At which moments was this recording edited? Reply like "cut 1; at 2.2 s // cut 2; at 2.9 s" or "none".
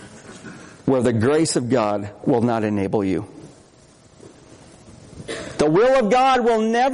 none